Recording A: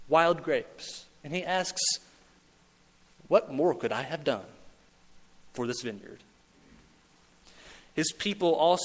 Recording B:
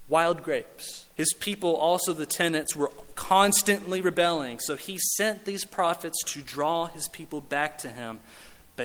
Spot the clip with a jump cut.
B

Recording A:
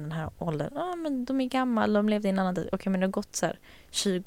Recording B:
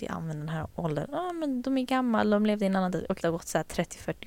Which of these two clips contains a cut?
B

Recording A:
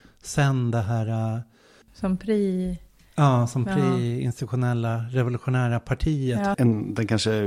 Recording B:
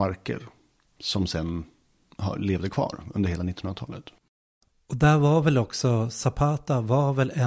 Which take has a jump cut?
A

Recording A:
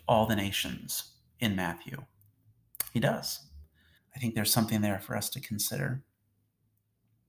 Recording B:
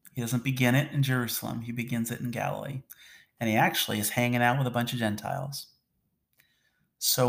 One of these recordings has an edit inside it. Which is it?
A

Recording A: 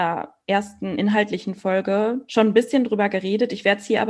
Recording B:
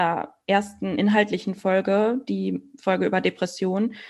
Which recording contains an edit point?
A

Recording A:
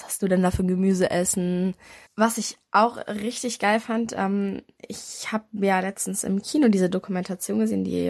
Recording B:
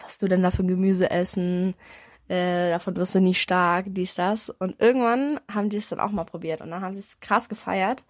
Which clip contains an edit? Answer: A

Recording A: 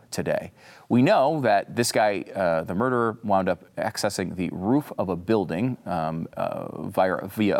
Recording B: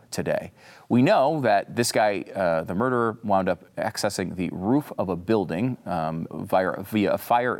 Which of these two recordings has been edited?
B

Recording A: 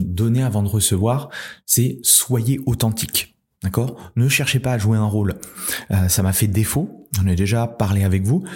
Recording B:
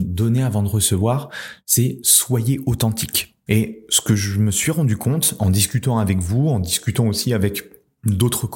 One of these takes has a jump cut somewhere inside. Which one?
B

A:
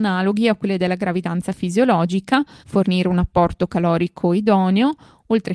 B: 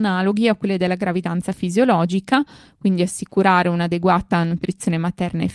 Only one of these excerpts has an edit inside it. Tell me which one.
A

